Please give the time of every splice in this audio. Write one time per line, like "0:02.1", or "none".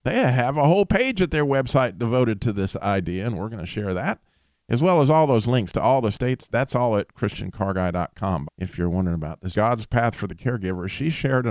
0:08.4
0:09.5